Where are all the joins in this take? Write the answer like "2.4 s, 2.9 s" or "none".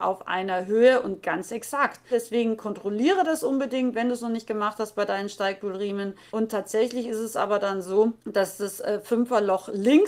2.1 s, 6.3 s, 8.2 s